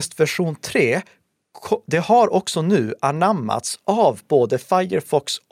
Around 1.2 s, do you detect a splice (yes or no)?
no